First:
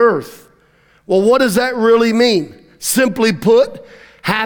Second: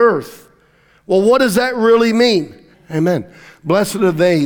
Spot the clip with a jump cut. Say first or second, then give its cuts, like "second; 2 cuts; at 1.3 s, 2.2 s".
second; 1 cut; at 2.7 s